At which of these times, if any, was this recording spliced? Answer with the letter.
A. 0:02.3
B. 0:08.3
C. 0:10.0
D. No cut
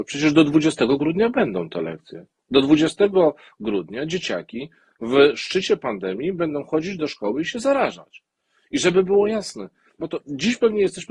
C